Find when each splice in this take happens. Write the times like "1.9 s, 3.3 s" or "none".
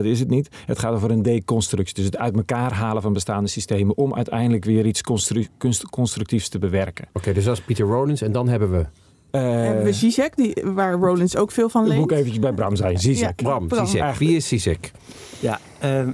none